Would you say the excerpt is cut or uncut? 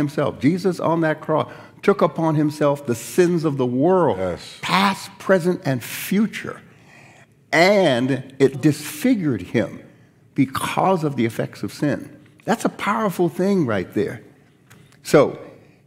cut